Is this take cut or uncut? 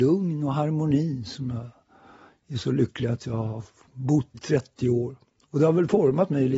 cut